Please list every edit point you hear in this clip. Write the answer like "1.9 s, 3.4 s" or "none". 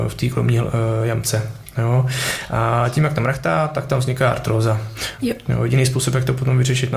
5.2 s